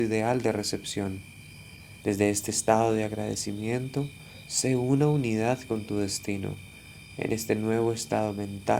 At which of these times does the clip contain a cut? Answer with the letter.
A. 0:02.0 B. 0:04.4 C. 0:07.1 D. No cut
A